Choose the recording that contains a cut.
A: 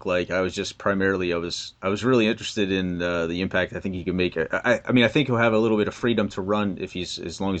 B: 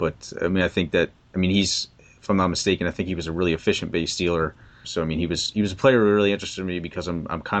B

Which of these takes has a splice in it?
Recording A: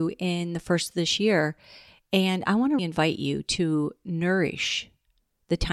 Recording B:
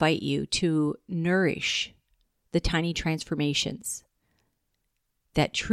A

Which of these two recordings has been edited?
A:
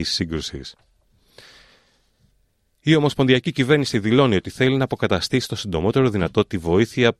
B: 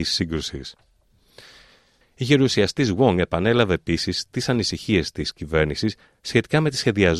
B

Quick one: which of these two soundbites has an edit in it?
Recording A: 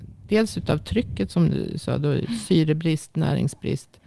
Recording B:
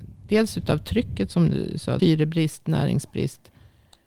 B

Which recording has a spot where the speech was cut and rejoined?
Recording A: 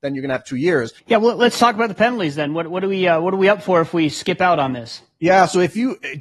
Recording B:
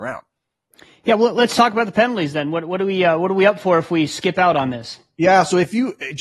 A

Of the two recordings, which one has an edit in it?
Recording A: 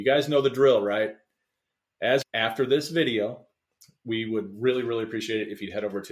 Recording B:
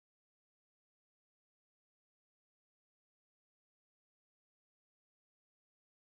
A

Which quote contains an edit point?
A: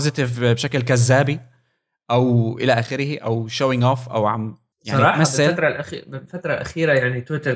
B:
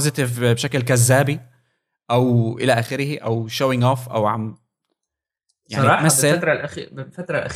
A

